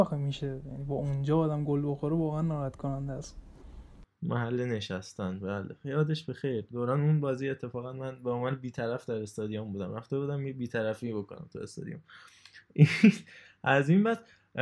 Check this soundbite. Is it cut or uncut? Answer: uncut